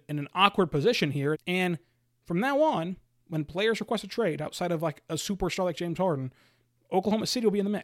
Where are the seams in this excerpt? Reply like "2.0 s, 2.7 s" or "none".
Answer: 1.3 s